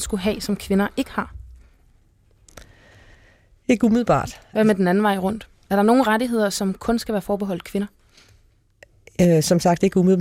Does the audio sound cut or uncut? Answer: uncut